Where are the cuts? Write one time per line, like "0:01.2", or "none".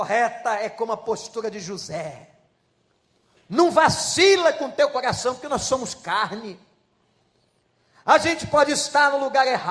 0:03.4